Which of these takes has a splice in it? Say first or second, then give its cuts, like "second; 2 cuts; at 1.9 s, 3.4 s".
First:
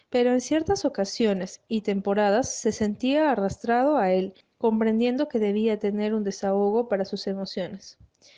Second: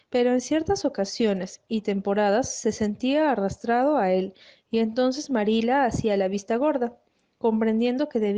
first; 1 cut; at 4.4 s